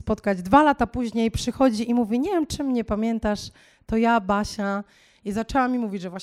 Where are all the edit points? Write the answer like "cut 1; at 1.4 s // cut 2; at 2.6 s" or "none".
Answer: none